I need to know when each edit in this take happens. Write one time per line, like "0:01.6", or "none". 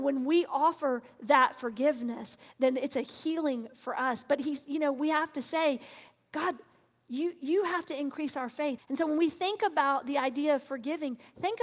0:08.8